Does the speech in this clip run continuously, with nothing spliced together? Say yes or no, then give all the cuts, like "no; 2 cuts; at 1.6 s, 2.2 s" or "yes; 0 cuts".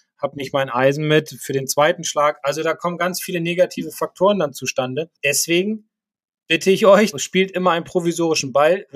no; 2 cuts; at 5.2 s, 7.1 s